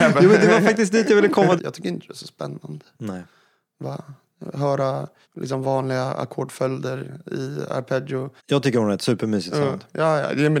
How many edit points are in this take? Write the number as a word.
two